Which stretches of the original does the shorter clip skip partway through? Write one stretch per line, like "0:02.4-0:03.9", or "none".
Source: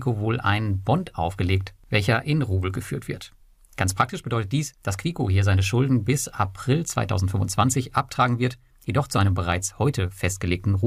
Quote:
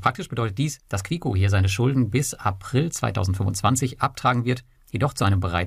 none